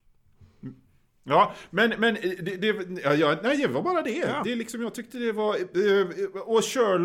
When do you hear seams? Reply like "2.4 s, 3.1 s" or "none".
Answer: none